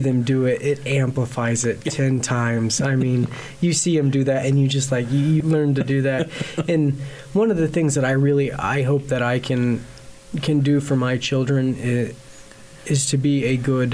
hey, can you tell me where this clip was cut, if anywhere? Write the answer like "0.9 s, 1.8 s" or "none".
5.4 s